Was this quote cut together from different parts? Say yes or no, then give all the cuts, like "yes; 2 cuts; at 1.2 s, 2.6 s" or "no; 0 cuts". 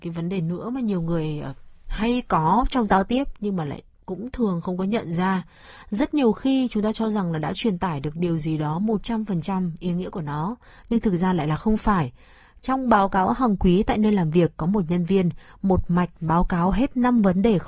no; 0 cuts